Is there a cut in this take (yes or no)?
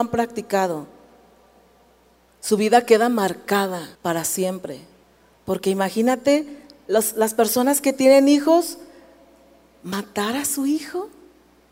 yes